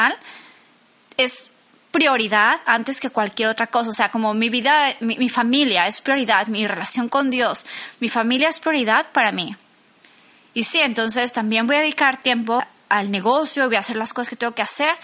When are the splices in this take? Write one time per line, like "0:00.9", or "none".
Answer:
0:12.6